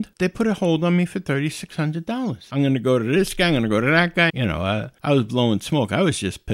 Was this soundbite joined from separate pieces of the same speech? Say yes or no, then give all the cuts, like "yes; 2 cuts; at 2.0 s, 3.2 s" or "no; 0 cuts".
yes; 2 cuts; at 2.5 s, 4.3 s